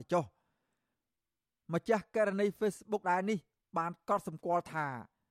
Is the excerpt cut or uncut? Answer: cut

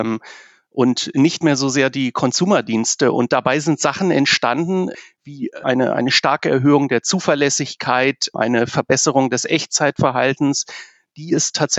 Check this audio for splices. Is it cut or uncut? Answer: uncut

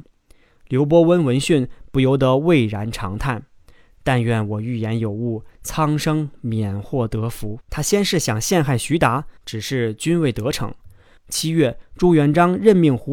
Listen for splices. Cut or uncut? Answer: cut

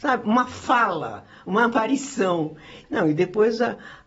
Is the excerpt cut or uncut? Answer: cut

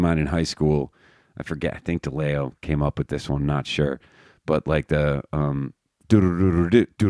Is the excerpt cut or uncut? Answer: uncut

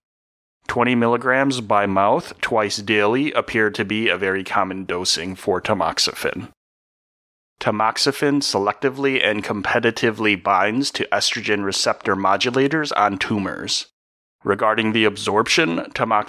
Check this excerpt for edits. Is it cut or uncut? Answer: cut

